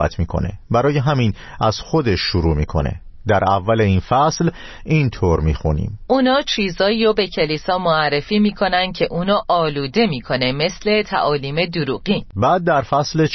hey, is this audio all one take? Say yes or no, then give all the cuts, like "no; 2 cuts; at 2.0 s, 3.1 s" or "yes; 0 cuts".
no; 2 cuts; at 6.1 s, 12.3 s